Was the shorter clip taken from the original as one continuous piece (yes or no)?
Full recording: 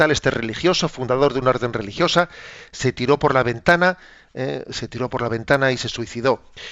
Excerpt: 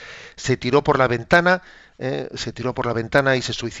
yes